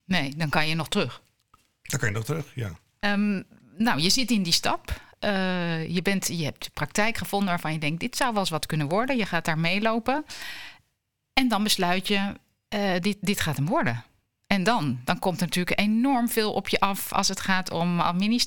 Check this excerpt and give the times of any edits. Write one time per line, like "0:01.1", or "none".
0:03.0